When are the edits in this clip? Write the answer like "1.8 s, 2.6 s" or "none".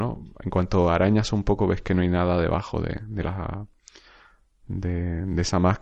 none